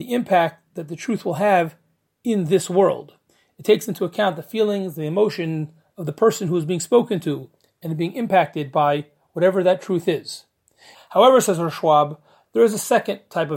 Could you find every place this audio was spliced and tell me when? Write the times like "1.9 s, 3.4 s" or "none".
10.9 s